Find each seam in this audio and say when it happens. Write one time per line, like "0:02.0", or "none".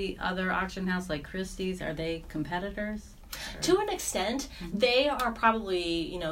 none